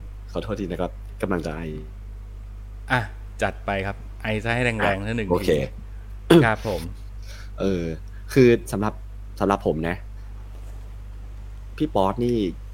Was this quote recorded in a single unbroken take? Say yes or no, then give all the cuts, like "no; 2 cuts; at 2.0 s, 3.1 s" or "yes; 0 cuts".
yes; 0 cuts